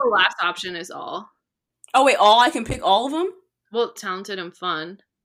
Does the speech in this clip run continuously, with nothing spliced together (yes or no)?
no